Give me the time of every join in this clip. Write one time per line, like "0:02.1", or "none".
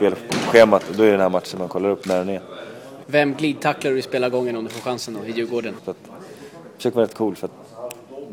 0:03.0
0:05.8